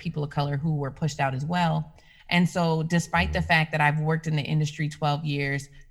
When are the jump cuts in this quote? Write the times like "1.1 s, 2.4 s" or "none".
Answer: 2.2 s